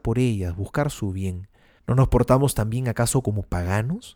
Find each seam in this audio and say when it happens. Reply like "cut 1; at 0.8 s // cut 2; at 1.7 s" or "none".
cut 1; at 1.8 s